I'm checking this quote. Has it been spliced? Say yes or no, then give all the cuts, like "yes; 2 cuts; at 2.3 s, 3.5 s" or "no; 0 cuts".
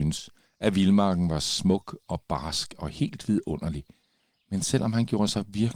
no; 0 cuts